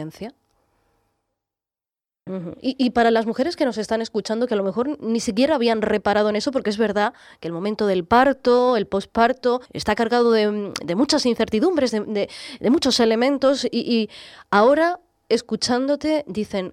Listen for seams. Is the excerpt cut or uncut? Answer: cut